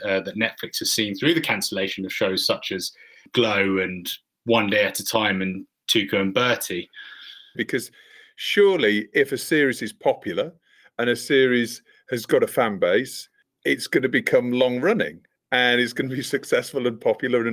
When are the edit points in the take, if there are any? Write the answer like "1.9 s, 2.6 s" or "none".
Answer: 7.5 s